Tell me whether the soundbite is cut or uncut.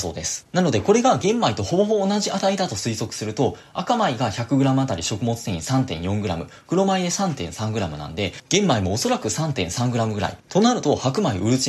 uncut